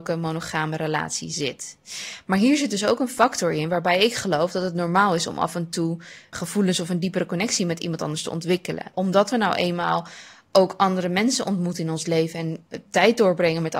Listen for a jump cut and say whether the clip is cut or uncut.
cut